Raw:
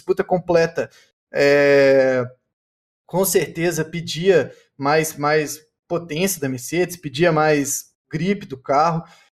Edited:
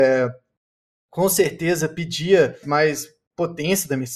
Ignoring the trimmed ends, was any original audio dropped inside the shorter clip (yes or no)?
yes